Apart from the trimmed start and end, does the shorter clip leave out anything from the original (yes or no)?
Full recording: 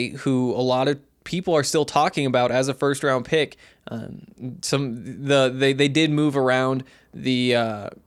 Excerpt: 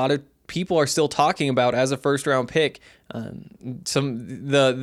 no